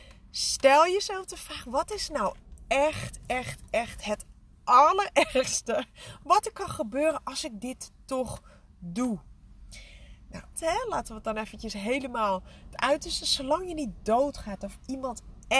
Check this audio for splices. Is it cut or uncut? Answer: cut